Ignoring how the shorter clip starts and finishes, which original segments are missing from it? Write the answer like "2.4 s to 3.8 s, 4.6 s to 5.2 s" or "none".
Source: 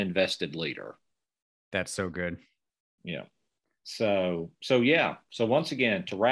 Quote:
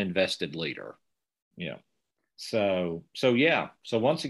1.5 s to 2.9 s